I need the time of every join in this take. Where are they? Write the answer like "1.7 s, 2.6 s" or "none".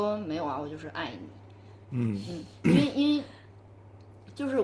none